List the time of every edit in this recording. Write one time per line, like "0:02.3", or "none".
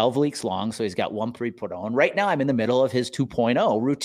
0:01.4